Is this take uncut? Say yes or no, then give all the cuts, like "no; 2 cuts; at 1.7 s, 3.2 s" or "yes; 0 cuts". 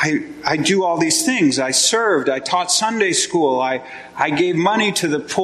yes; 0 cuts